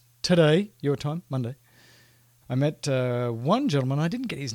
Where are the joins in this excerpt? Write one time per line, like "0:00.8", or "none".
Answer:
0:02.4